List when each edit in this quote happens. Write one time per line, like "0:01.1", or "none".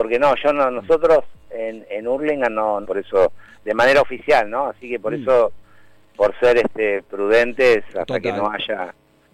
0:02.8